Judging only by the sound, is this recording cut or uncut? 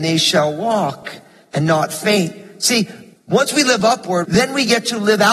cut